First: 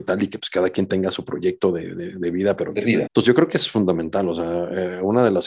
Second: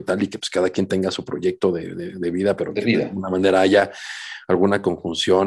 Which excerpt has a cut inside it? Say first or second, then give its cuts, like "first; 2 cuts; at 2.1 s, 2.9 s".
first; 1 cut; at 3.1 s